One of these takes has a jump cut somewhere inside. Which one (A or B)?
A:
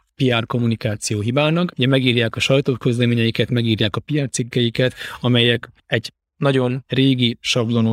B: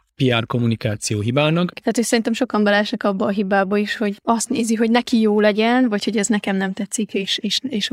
B